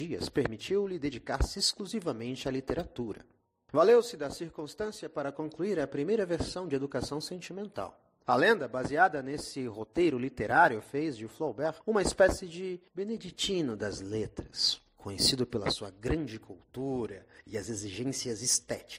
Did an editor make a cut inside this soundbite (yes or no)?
no